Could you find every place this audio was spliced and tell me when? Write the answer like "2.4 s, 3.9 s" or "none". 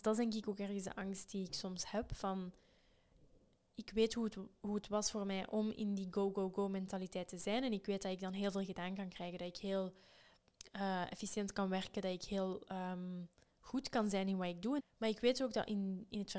14.8 s